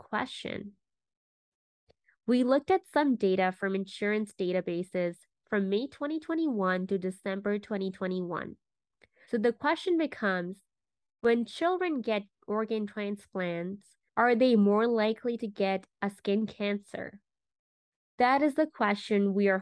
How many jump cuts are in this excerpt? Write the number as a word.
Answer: two